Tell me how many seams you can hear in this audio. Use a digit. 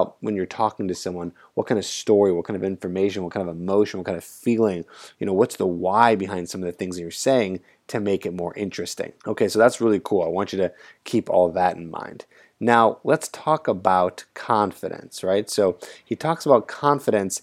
1